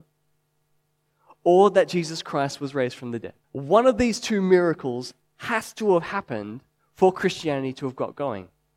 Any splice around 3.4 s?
yes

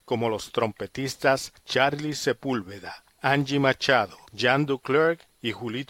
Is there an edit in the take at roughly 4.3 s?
yes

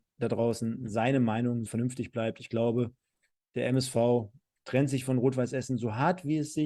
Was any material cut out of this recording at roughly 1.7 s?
yes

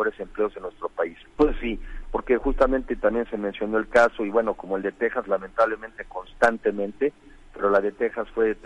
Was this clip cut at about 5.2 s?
no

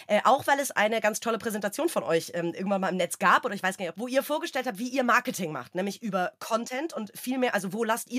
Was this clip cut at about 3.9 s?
yes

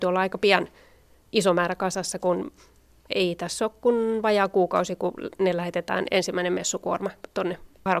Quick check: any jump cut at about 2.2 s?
no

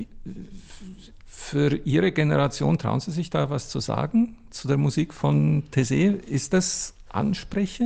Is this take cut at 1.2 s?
no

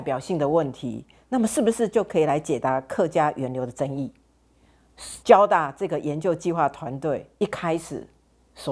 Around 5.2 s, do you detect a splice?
yes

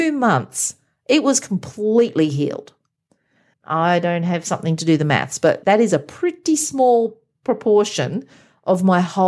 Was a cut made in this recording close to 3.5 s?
yes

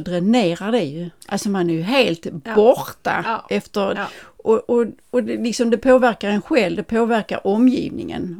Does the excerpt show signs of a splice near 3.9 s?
yes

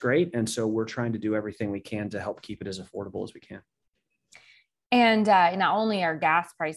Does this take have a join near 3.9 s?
no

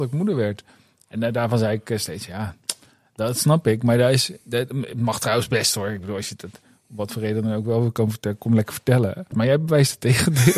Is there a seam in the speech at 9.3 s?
yes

